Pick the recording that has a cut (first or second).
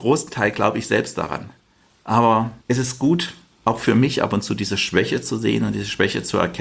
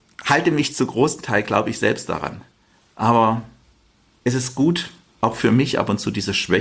first